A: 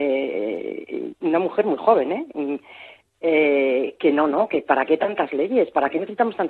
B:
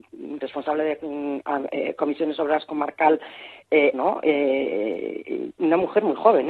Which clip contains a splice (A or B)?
B